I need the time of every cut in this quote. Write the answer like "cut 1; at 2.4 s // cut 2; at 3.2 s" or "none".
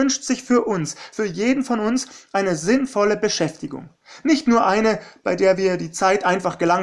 none